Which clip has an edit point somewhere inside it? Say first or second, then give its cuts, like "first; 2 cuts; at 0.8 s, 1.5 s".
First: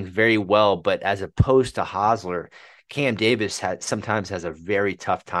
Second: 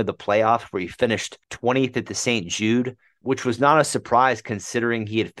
second; 2 cuts; at 1.4 s, 3.2 s